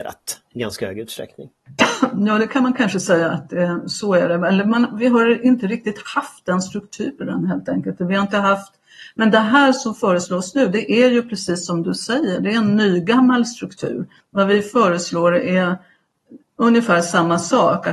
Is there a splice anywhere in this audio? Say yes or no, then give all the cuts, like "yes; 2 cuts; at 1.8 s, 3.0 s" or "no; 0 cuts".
yes; 1 cut; at 14.2 s